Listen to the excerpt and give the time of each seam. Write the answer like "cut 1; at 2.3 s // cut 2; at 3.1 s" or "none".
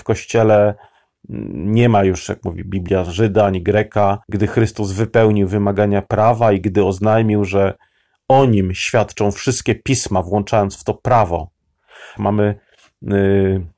cut 1; at 4.2 s // cut 2; at 12.2 s